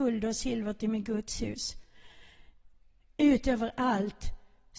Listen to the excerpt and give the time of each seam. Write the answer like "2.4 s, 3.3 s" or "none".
none